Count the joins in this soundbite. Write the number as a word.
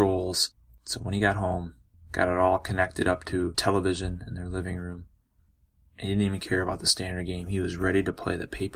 one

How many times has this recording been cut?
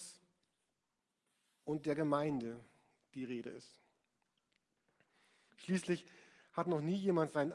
one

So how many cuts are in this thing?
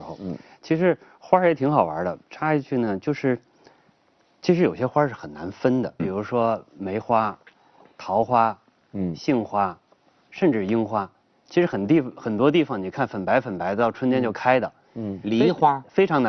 one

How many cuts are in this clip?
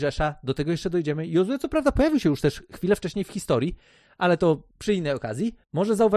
zero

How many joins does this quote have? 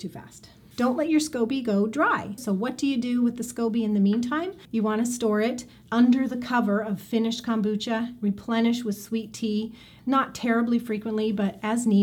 one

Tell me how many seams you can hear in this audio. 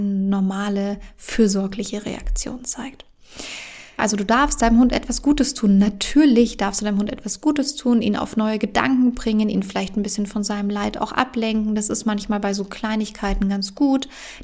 one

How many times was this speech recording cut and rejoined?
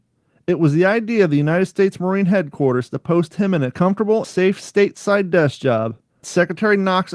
one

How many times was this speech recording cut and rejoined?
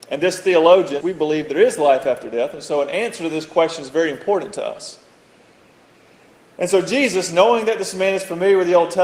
one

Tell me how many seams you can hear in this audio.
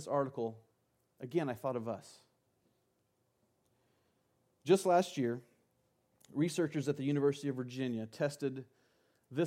zero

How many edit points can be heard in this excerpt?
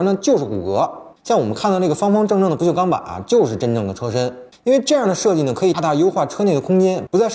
one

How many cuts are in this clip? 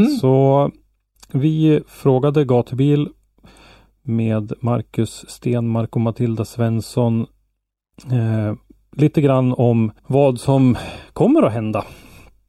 one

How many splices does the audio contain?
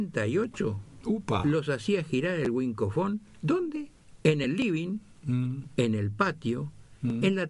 zero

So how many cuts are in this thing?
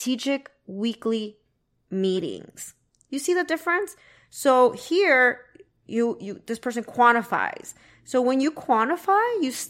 zero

